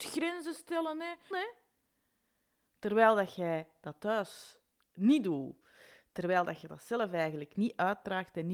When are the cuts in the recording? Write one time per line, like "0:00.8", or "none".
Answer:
0:01.3